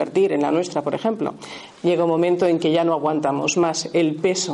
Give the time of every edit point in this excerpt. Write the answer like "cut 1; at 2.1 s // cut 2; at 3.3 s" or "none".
cut 1; at 1.7 s

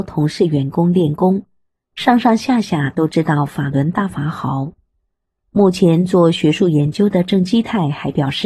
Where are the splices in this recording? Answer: none

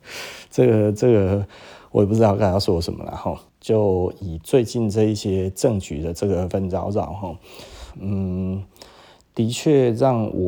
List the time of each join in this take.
cut 1; at 3.5 s // cut 2; at 6.5 s // cut 3; at 7.9 s

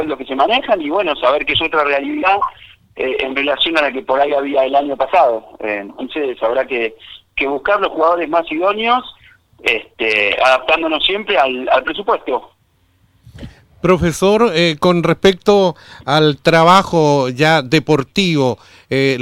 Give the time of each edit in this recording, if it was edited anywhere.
none

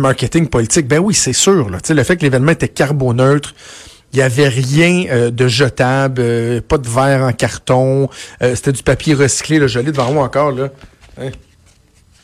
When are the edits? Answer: none

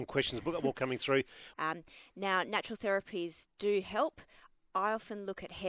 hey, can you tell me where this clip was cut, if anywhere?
cut 1; at 1.5 s

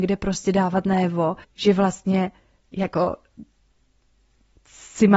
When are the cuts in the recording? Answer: cut 1; at 1.4 s

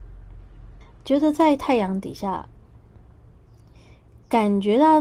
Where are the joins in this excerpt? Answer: none

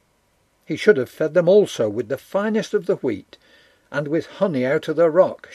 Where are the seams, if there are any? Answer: none

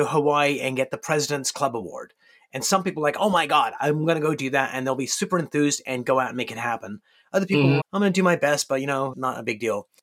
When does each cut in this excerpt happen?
cut 1; at 7.8 s // cut 2; at 9.1 s

